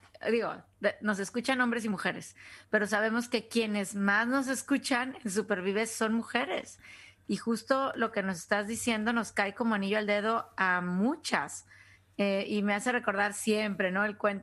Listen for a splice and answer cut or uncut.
uncut